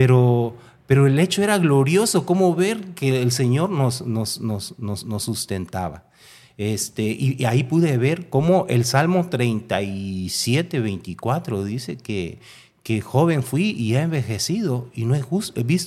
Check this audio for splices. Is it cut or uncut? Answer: uncut